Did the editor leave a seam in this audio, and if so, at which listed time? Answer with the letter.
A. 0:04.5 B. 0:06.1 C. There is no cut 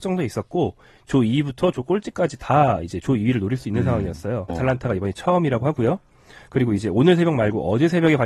A